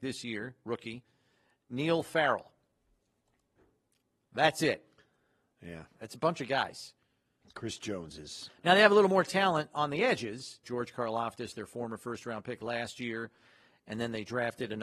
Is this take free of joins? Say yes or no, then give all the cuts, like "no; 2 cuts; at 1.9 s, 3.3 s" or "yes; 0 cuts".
no; 3 cuts; at 5.9 s, 7.4 s, 10.6 s